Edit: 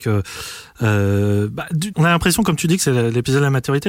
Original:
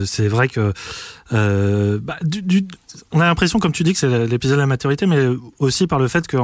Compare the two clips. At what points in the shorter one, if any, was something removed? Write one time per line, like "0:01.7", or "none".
0:01.9